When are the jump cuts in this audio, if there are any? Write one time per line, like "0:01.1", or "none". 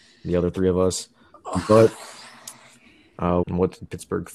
0:03.4